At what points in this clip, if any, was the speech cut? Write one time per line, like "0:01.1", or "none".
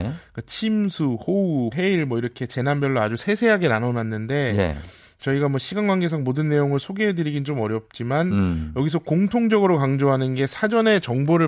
0:01.7